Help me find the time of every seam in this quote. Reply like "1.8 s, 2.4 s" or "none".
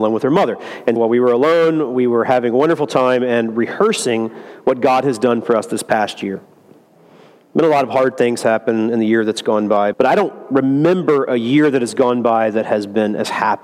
1.0 s, 9.9 s